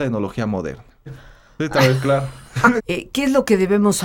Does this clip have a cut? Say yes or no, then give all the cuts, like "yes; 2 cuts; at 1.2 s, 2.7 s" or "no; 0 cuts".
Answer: yes; 2 cuts; at 1.1 s, 2.8 s